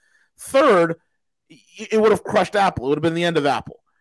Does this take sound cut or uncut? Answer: uncut